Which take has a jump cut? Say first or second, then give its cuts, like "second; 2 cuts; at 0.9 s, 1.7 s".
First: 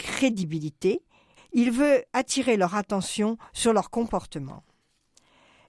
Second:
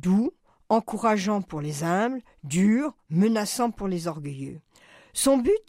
first; 1 cut; at 1.4 s